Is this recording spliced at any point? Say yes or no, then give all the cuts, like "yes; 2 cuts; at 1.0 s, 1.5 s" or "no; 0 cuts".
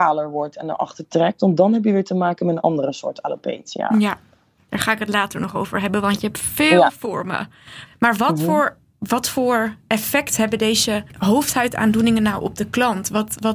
yes; 2 cuts; at 7.8 s, 11.1 s